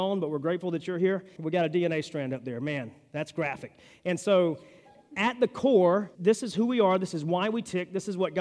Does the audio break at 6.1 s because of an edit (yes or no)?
yes